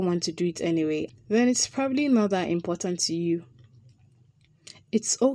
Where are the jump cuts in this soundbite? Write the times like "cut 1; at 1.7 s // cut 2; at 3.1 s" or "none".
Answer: cut 1; at 1.1 s

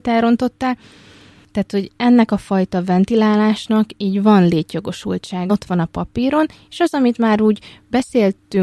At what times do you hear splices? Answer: cut 1; at 5.5 s

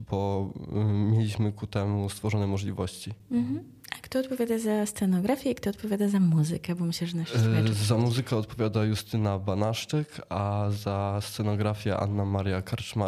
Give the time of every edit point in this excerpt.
none

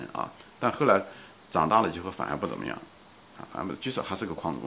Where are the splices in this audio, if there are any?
none

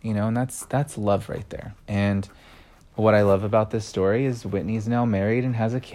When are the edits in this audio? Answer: cut 1; at 1.8 s

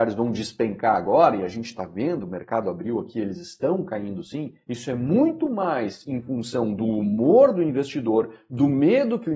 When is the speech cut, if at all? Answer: none

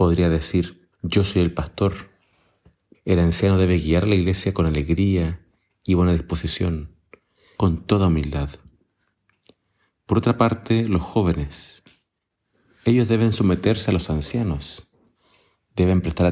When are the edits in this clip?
cut 1; at 0.9 s // cut 2; at 2.9 s // cut 3; at 7.6 s

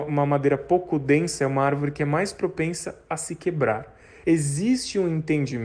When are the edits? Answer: cut 1; at 4.2 s

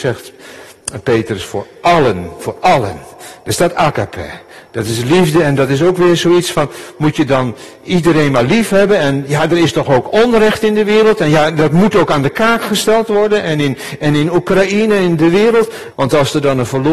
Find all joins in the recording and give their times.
cut 1; at 15.9 s

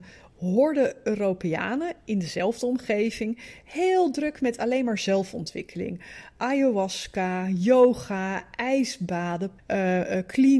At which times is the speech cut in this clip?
cut 1; at 9.6 s

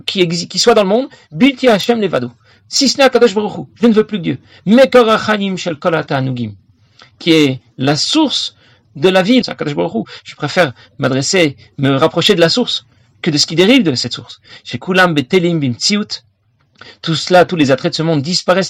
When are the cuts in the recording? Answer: cut 1; at 9.4 s

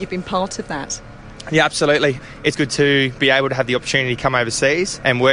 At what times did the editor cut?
cut 1; at 2.5 s

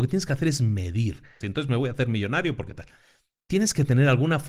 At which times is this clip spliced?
cut 1; at 1.4 s

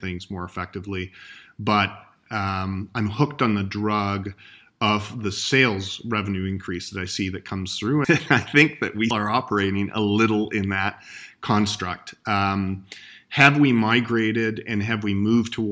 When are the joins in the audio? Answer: cut 1; at 8.0 s // cut 2; at 9.1 s

